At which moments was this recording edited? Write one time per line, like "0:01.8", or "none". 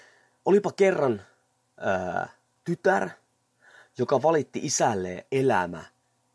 0:05.3